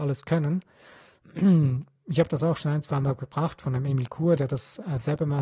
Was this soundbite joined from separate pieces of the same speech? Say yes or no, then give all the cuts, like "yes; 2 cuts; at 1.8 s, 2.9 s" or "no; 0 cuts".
no; 0 cuts